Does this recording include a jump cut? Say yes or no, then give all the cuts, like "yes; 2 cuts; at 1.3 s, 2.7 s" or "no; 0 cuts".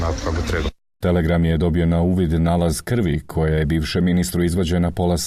yes; 1 cut; at 1.0 s